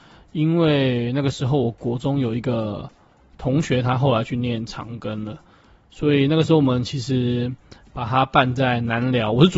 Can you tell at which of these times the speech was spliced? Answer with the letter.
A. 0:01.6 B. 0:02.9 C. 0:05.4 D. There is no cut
D